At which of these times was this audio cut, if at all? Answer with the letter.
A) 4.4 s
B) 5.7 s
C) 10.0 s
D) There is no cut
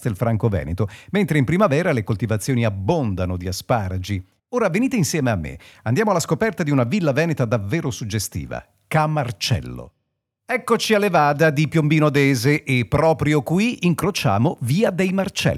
A